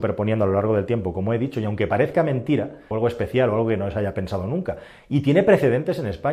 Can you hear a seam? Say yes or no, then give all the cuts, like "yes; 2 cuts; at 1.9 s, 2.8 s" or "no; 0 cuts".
yes; 1 cut; at 2.9 s